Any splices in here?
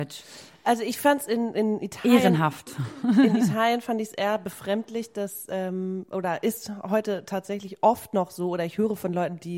no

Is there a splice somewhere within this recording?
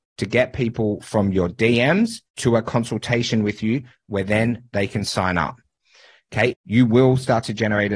yes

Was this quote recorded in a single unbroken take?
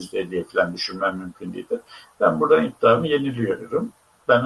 yes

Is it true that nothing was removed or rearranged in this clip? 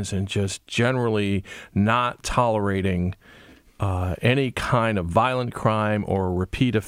yes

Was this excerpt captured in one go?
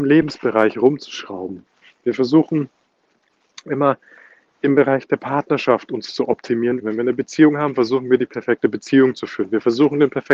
no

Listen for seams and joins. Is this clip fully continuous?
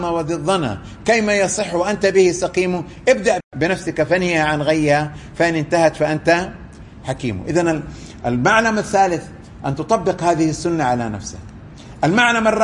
no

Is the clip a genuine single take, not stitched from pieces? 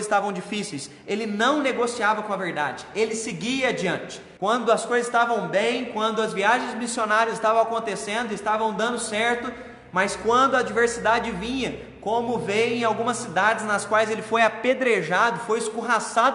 no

